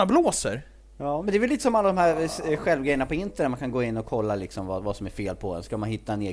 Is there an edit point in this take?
no; 0 cuts

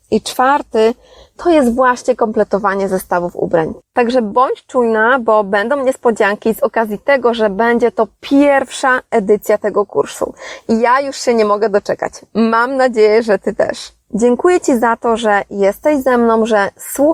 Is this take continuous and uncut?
no; 2 cuts; at 3.8 s, 14.0 s

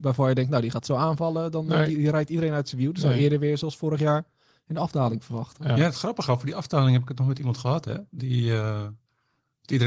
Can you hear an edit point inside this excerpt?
no; 0 cuts

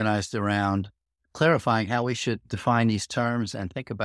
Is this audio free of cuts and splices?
yes; 0 cuts

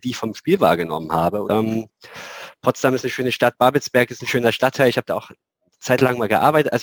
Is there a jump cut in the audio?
yes; 1 cut; at 1.5 s

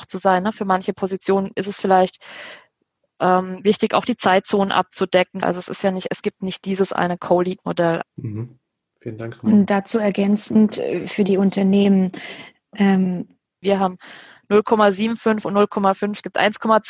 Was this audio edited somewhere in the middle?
yes; 3 cuts; at 5.4 s, 8.0 s, 13.6 s

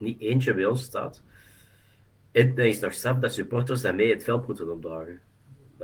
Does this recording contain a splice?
no; 0 cuts

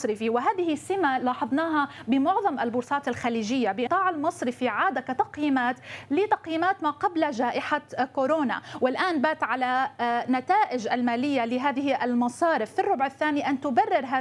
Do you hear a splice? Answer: yes; 1 cut; at 3.9 s

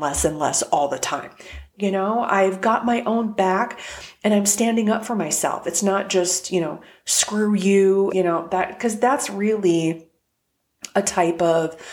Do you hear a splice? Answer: yes; 2 cuts; at 1.7 s, 8.1 s

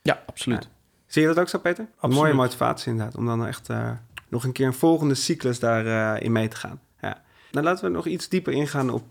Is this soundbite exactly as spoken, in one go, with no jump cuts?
no; 1 cut; at 1.9 s

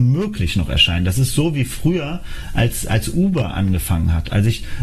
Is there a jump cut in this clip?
no; 0 cuts

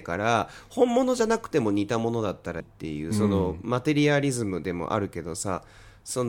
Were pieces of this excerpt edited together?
yes; 1 cut; at 2.6 s

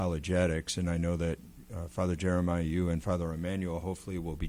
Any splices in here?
no; 0 cuts

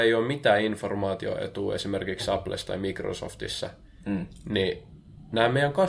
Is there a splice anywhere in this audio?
no; 0 cuts

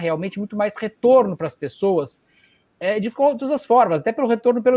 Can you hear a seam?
no; 0 cuts

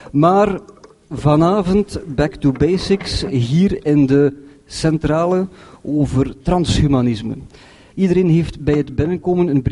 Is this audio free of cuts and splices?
no; 1 cut; at 7.9 s

